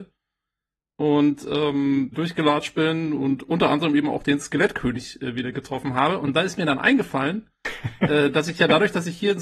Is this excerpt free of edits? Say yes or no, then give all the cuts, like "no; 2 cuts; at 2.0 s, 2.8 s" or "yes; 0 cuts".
no; 1 cut; at 2.1 s